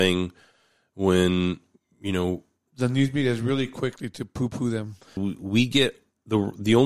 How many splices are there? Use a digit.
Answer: 1